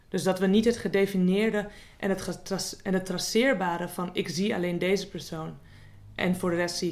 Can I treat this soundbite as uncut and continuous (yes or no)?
yes